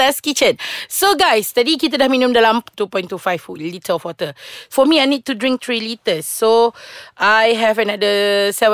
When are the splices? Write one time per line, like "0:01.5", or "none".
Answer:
none